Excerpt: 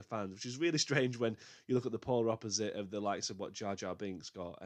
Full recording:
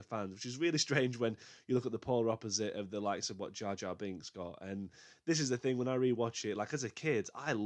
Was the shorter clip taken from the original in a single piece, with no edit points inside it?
yes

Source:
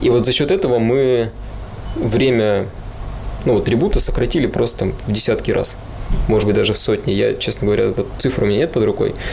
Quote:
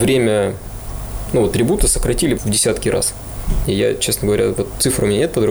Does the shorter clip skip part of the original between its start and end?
yes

